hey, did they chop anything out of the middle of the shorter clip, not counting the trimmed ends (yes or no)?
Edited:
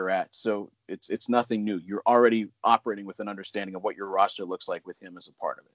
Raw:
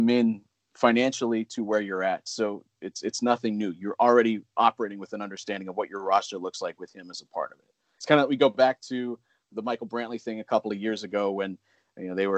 no